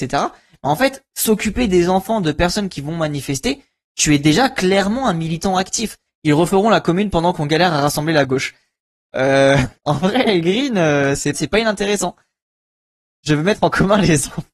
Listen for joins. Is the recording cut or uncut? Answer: cut